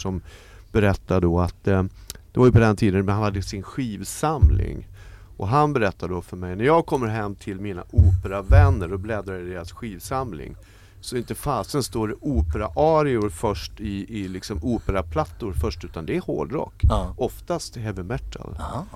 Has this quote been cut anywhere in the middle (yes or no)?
no